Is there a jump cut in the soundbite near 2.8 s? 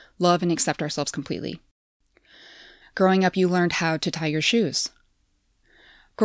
yes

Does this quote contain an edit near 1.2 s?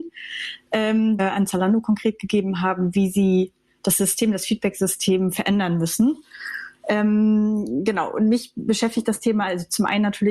yes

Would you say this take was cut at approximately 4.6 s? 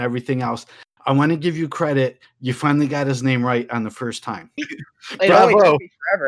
yes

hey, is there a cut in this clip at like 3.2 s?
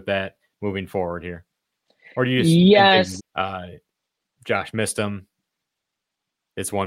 yes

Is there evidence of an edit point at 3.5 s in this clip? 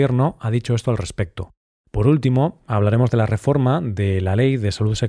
no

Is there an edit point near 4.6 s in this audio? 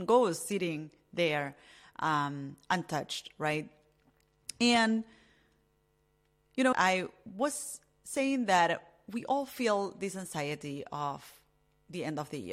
no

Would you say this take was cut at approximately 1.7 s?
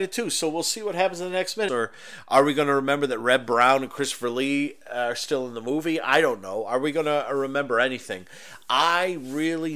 yes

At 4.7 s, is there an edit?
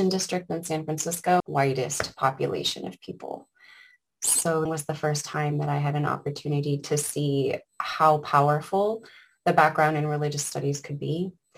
yes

